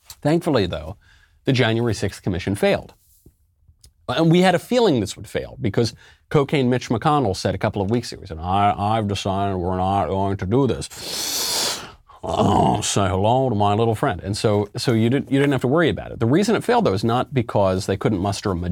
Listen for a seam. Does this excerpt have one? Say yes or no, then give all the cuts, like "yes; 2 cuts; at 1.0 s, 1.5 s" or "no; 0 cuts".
no; 0 cuts